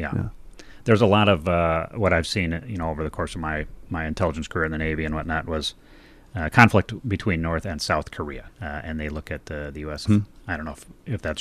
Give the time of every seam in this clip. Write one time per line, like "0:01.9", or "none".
0:08.5
0:10.1